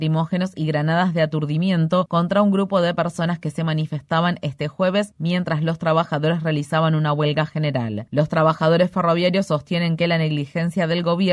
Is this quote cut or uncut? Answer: cut